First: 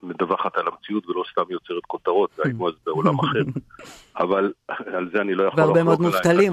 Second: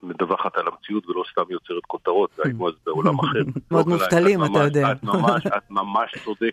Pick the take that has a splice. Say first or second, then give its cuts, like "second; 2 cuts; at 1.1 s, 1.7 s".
second; 1 cut; at 3.7 s